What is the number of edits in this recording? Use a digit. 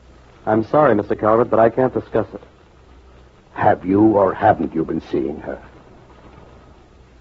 1